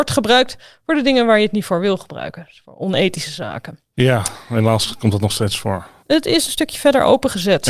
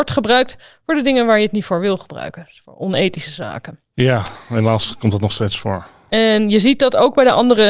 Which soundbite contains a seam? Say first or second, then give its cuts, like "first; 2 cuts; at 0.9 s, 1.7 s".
first; 1 cut; at 6.0 s